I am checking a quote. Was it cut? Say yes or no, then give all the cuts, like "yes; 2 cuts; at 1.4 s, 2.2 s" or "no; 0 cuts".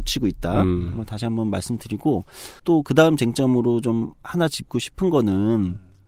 yes; 1 cut; at 2.6 s